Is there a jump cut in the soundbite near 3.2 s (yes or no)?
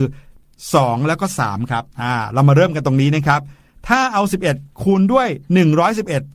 no